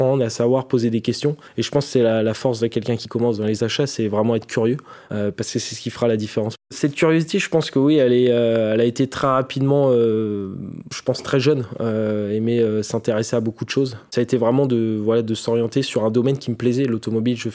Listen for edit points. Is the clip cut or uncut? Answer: uncut